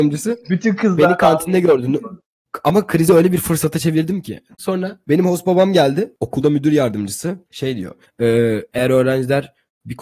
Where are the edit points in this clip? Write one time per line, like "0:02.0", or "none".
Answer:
0:04.6
0:08.0